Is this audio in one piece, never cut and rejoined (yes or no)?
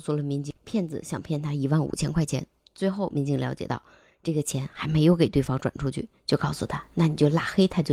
yes